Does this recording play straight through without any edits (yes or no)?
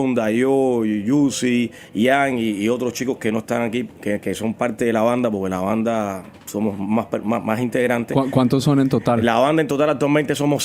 yes